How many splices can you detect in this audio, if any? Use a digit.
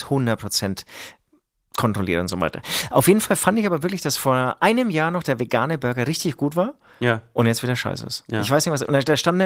0